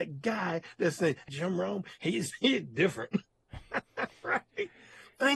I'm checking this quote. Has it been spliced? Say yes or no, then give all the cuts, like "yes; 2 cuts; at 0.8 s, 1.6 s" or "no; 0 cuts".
yes; 1 cut; at 1.3 s